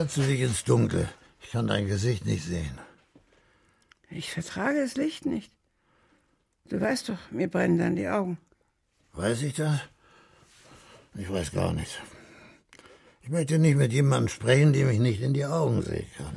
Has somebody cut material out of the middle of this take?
no; 0 cuts

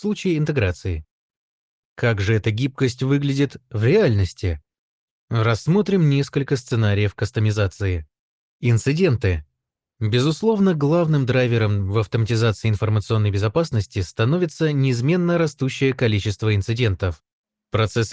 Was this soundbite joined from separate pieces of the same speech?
no; 0 cuts

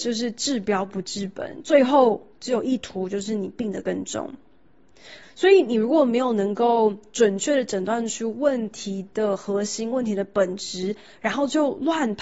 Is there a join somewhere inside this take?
yes; 1 cut; at 5.2 s

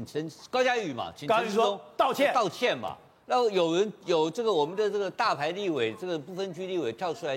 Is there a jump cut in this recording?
no; 0 cuts

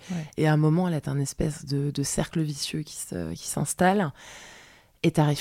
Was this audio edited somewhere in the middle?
no; 0 cuts

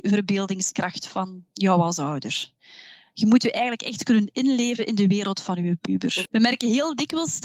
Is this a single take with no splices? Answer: no; 1 cut; at 6.3 s

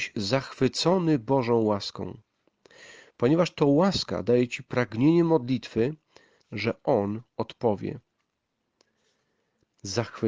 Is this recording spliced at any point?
yes; 1 cut; at 6.4 s

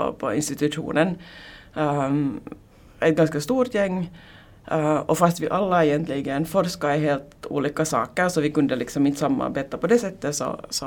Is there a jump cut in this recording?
no; 0 cuts

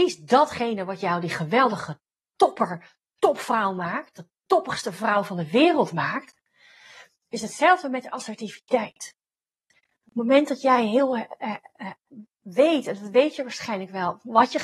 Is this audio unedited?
yes; 0 cuts

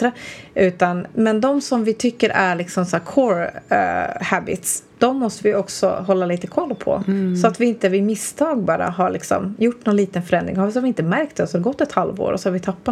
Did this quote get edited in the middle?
yes; 1 cut; at 4.9 s

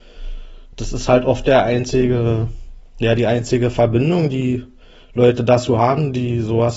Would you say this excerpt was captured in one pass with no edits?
yes; 0 cuts

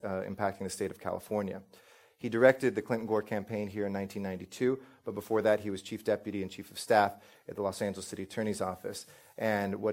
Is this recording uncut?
yes; 0 cuts

